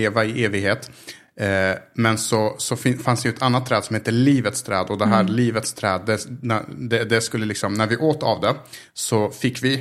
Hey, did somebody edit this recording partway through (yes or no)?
no